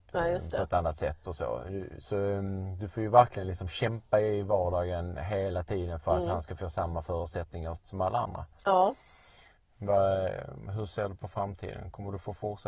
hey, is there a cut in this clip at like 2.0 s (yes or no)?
no